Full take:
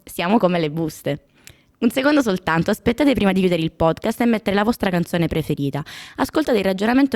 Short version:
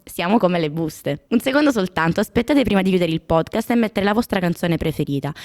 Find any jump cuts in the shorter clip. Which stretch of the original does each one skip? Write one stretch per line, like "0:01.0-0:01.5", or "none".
0:01.3-0:01.8